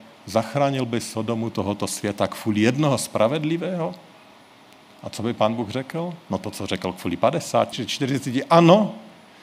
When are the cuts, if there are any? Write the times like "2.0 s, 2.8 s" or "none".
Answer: 7.7 s